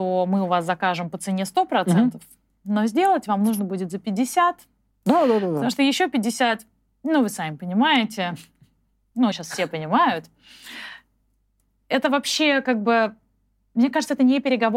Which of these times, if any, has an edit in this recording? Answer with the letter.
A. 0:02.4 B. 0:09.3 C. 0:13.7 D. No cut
B